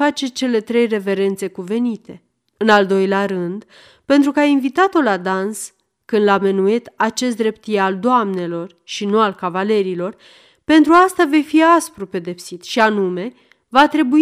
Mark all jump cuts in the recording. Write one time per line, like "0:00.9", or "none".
none